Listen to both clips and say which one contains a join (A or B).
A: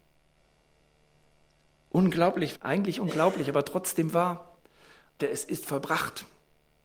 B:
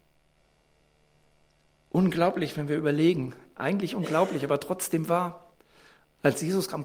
A